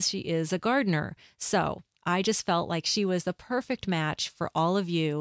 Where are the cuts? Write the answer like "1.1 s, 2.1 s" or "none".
none